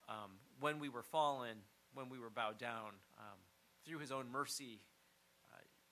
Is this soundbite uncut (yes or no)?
no